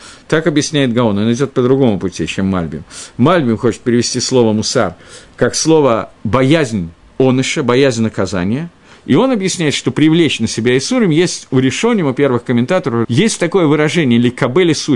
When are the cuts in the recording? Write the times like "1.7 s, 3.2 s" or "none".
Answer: 6.2 s, 8.9 s, 13.0 s